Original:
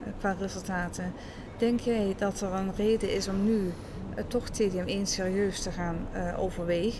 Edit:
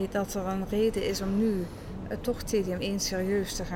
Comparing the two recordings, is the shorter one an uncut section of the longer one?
yes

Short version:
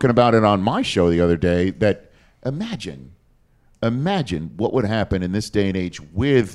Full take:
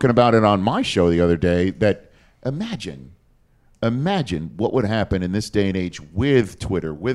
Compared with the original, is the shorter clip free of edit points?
yes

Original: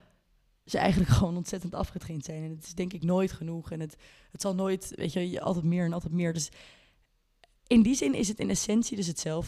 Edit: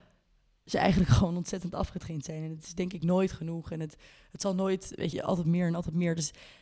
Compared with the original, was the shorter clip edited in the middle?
yes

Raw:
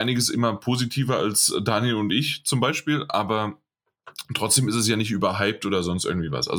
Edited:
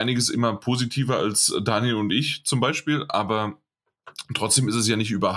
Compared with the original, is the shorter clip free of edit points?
yes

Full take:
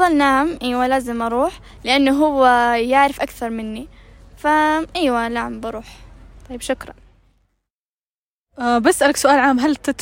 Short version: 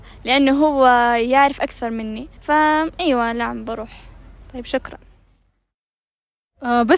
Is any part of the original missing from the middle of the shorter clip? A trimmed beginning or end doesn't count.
yes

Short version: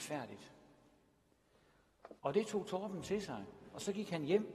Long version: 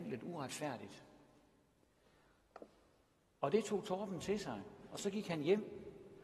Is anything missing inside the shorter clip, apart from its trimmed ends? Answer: yes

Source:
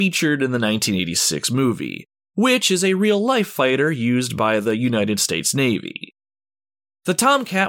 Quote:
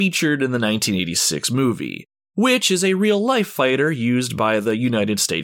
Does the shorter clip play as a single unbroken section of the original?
yes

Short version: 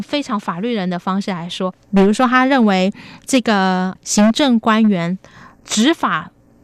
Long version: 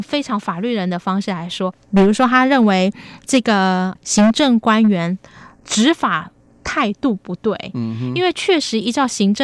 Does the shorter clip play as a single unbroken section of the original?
yes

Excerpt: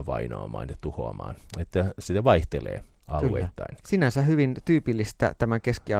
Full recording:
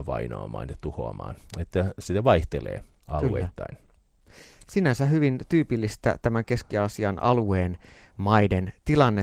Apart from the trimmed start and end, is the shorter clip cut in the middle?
yes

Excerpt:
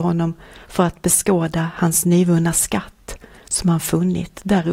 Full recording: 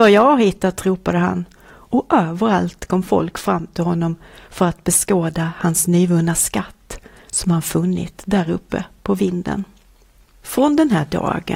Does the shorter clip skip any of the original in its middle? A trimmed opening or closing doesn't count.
no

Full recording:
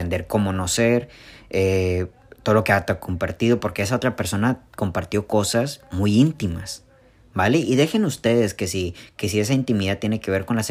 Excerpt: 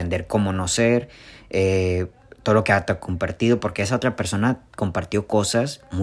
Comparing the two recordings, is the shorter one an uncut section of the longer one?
yes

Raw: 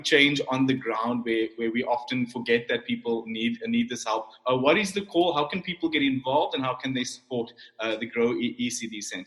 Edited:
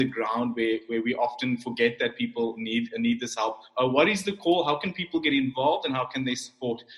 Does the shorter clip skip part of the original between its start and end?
no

